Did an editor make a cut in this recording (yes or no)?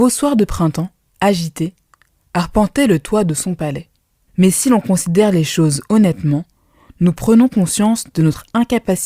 yes